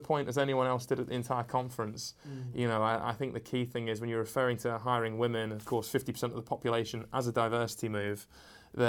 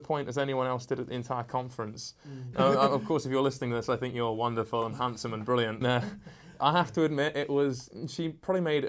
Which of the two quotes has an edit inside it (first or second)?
second